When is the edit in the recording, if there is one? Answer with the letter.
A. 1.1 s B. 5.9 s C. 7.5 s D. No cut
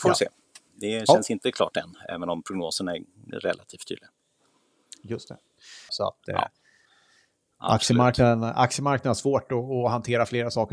B